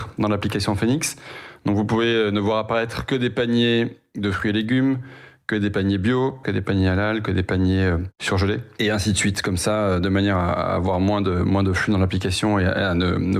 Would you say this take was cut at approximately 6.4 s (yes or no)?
yes